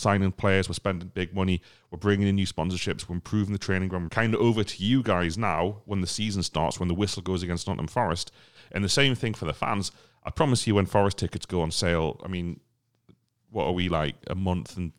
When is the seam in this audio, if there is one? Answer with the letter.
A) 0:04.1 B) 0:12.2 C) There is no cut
A